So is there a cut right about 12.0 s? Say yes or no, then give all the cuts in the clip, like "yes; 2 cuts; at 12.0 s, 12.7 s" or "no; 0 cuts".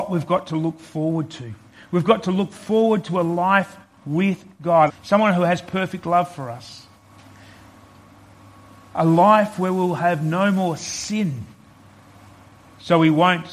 no; 1 cut; at 4.9 s